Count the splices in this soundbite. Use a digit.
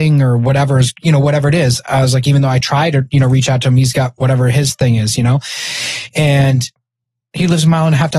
0